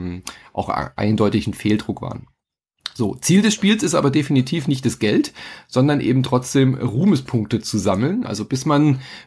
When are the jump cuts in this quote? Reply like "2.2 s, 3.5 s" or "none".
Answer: 8.2 s